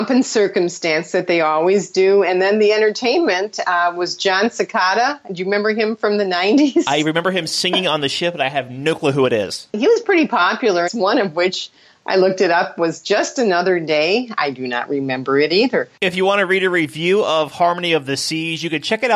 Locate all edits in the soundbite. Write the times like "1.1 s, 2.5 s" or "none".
10.9 s